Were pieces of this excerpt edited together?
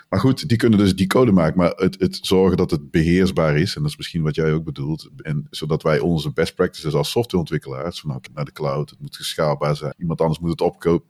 yes; 3 cuts; at 5.2 s, 8.3 s, 9.9 s

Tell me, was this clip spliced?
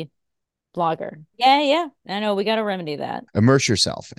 yes; 2 cuts; at 1.3 s, 3.3 s

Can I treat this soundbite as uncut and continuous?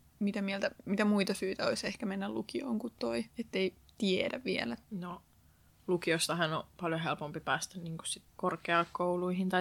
no; 3 cuts; at 3.3 s, 4.8 s, 8.3 s

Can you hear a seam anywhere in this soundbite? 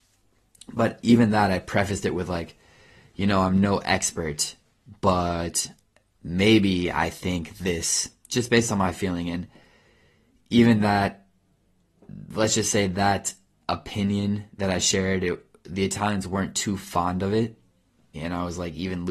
yes; 1 cut; at 18.1 s

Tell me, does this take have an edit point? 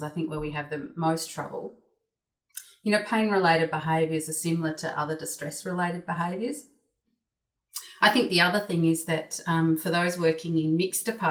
yes; 1 cut; at 7.1 s

